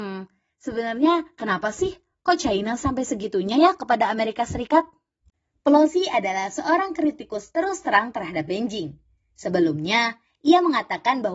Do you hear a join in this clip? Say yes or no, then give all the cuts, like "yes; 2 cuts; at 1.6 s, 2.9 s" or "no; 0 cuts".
no; 0 cuts